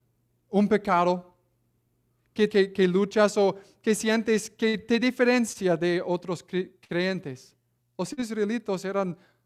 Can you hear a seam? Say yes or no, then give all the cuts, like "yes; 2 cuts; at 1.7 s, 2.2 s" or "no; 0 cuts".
yes; 2 cuts; at 2.5 s, 7.8 s